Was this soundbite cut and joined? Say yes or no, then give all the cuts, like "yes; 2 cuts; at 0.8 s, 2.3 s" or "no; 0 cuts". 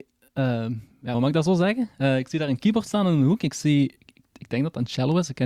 yes; 1 cut; at 1.1 s